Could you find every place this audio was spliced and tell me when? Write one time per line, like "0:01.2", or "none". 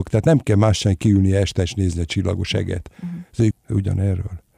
0:03.5

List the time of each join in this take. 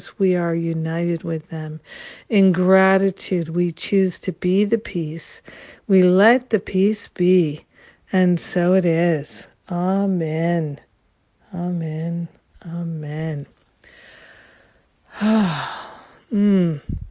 none

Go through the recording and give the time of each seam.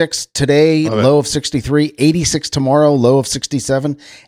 none

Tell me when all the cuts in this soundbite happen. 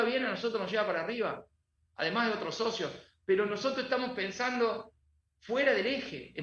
none

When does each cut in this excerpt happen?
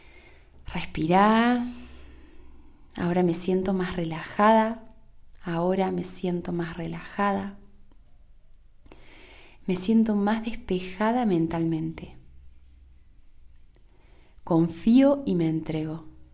none

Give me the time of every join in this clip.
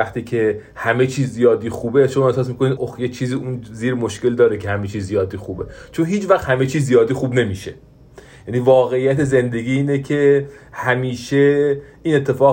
0:02.8

